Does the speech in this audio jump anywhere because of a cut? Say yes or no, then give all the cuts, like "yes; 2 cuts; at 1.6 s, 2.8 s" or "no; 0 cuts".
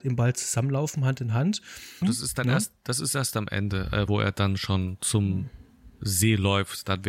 yes; 2 cuts; at 2.0 s, 4.1 s